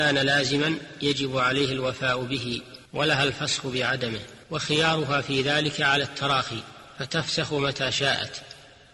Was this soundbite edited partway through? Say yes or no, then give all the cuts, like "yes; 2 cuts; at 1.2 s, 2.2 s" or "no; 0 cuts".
yes; 2 cuts; at 2.9 s, 4.4 s